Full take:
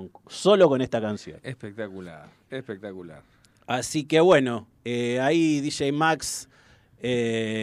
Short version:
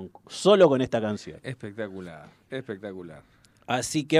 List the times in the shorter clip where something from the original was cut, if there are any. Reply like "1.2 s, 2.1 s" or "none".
none